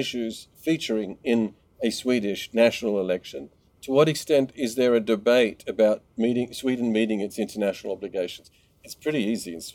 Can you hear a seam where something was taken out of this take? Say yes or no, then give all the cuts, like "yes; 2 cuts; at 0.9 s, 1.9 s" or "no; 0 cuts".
no; 0 cuts